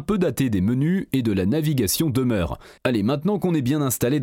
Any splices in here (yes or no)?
yes